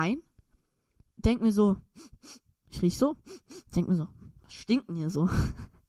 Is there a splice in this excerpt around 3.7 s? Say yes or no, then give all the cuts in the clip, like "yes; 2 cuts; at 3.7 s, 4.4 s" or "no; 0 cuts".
no; 0 cuts